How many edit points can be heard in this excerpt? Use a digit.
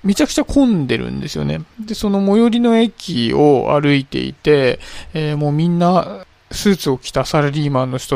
0